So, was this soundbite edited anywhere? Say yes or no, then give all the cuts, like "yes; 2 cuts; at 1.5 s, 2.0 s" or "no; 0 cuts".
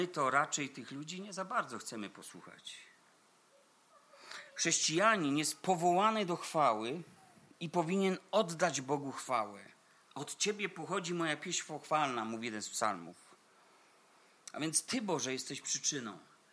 no; 0 cuts